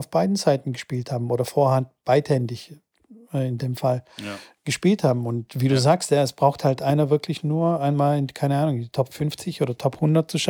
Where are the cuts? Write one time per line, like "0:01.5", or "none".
none